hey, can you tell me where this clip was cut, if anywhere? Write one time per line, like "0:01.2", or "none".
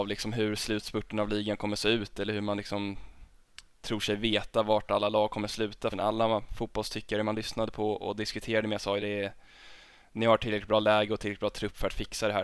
0:05.9
0:09.0

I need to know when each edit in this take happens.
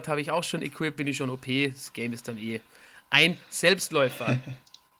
0:01.0

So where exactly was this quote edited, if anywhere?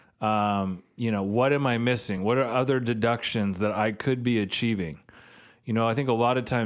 none

